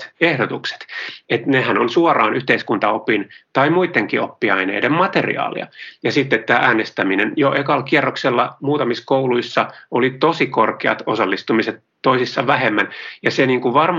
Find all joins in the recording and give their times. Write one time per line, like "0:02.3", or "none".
none

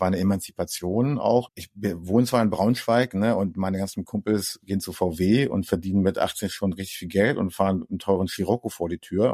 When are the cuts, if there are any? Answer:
0:01.5

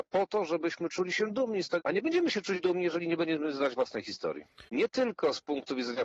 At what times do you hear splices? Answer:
0:01.8
0:04.7

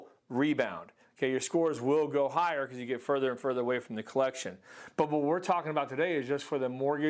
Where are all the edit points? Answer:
none

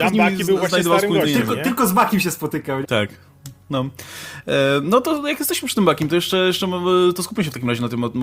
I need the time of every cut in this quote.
0:02.8

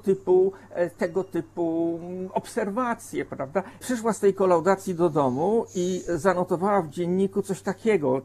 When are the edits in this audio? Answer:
0:03.8

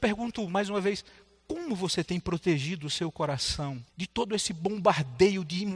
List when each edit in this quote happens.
0:03.9

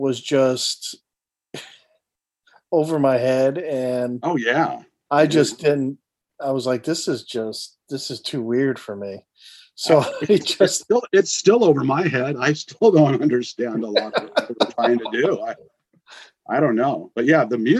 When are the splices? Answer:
none

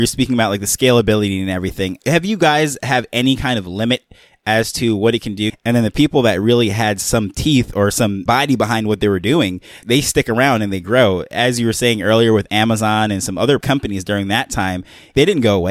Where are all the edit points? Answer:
0:05.5

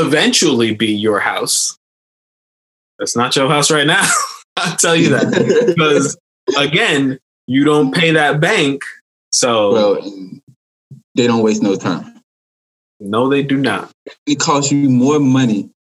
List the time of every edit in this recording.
0:09.2
0:11.0

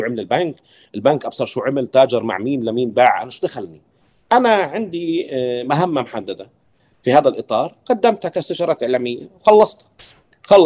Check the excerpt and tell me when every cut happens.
none

